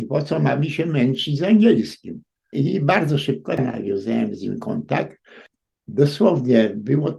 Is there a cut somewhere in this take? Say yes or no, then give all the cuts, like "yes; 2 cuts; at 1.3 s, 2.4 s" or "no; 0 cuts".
yes; 1 cut; at 2.5 s